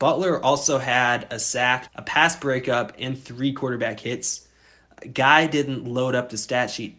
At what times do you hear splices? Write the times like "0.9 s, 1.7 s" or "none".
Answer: 1.9 s